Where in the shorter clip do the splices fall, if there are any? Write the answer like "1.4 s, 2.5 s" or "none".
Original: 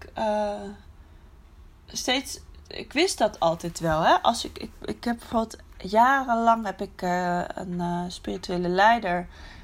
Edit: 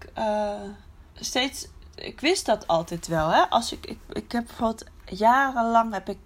1.1 s